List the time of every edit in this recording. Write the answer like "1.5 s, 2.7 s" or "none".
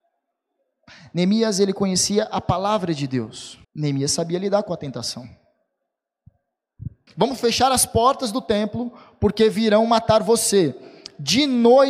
3.6 s, 7.1 s